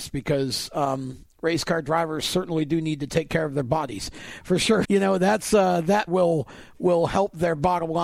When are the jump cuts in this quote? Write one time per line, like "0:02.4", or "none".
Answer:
0:04.8
0:06.1